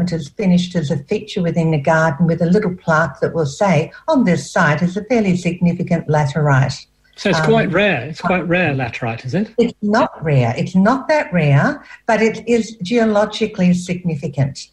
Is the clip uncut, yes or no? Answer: yes